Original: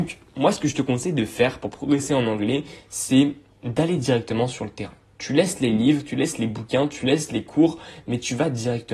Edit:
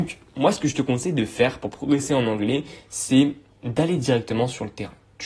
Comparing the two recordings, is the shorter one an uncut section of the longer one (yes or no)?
yes